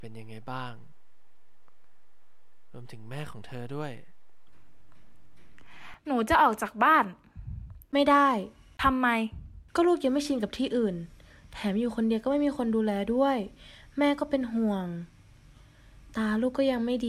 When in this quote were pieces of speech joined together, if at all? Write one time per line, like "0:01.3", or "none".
0:09.7